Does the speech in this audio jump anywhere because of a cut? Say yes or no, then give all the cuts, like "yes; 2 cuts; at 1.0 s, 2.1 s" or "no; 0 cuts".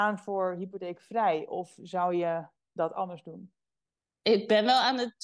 no; 0 cuts